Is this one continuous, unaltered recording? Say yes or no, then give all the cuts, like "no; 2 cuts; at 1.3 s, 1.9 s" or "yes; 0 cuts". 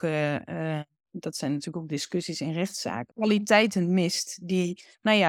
no; 2 cuts; at 1.0 s, 3.1 s